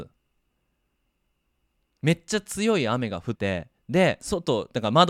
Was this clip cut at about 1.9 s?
no; 1 cut; at 3.3 s

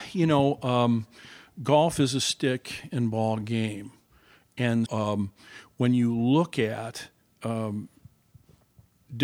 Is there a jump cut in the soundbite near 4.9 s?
yes; 1 cut; at 4.9 s

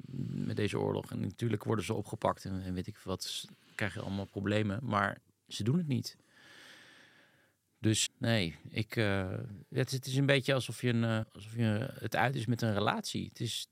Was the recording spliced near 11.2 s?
yes; 2 cuts; at 8.1 s, 11.2 s

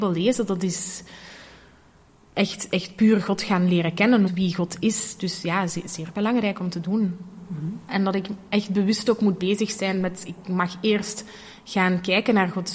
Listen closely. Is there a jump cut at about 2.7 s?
no; 2 cuts; at 4.3 s, 7.9 s

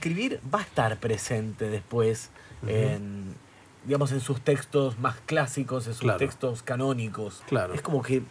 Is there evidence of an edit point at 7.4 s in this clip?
yes; 1 cut; at 7.4 s

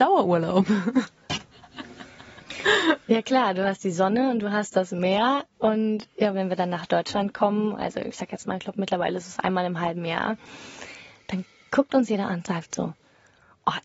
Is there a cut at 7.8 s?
no; 1 cut; at 6.3 s

